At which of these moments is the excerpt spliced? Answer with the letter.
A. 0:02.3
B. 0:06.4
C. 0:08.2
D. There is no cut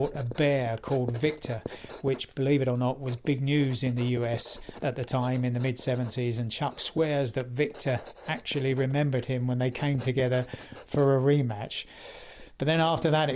D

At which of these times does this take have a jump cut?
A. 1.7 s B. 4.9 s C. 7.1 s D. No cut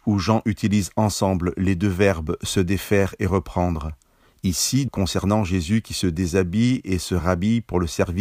B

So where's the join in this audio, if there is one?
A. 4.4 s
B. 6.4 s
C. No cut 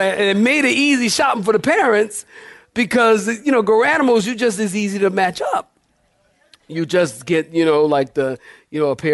C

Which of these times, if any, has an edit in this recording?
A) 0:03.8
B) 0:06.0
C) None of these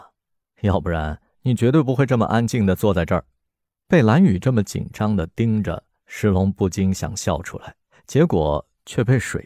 A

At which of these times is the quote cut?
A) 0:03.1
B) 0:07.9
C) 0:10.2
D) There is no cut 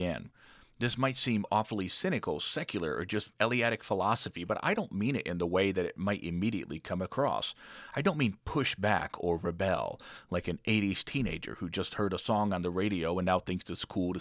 D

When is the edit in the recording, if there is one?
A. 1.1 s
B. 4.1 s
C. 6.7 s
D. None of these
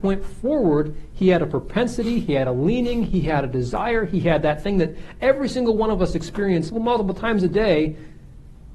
C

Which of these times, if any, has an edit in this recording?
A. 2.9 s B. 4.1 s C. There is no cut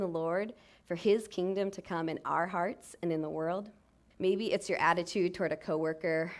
B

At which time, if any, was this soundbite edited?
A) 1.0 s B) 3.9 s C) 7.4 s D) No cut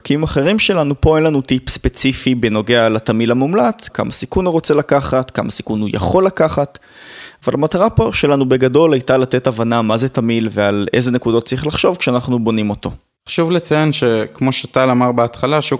B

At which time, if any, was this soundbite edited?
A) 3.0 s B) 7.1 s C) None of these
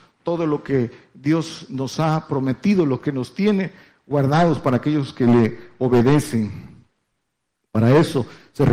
C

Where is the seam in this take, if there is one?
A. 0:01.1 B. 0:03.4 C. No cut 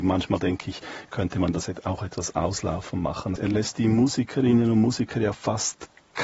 B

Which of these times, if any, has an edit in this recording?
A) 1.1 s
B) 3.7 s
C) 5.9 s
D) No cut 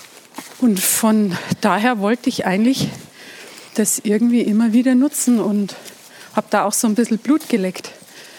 B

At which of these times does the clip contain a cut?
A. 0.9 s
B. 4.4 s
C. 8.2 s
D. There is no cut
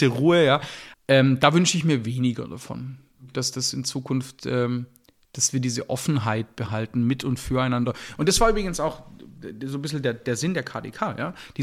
A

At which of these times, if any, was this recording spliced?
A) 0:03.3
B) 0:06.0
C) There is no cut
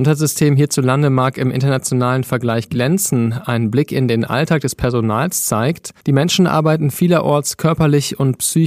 B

